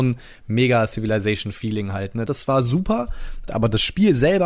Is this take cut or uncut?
cut